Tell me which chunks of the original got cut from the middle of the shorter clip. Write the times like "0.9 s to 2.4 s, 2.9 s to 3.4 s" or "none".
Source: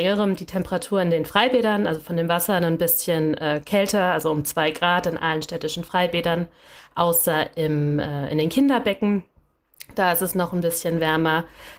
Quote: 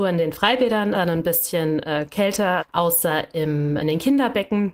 1.9 s to 2.5 s, 4.1 s to 6.8 s, 8.0 s to 8.3 s